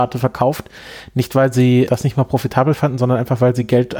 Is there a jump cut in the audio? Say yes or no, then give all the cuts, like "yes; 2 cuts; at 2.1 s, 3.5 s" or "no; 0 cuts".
yes; 1 cut; at 1.9 s